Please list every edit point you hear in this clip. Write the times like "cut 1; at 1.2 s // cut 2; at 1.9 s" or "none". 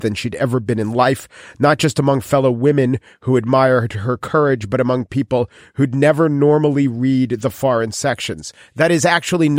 none